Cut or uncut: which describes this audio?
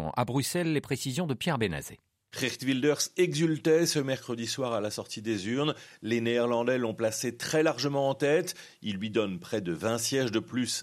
uncut